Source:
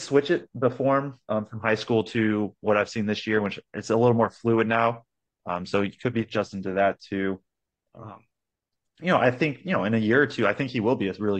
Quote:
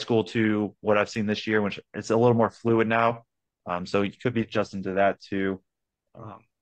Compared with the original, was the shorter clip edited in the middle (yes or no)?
no